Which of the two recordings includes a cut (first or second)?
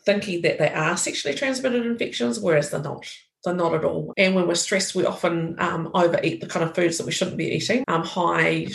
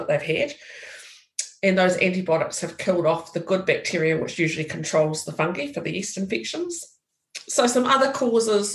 first